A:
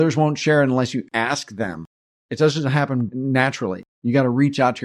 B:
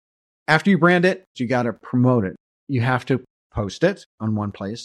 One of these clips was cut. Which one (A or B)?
B